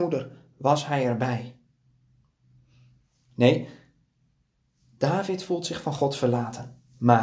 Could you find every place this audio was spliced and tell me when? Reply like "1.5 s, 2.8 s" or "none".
none